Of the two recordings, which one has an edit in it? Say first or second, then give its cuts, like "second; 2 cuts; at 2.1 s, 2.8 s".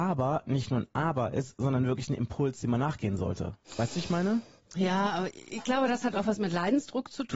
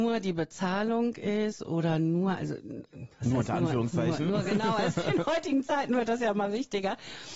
first; 1 cut; at 3.6 s